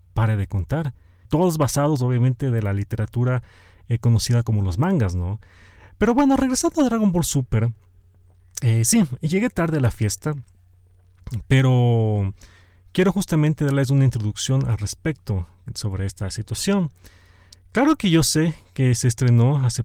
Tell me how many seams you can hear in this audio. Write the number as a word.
one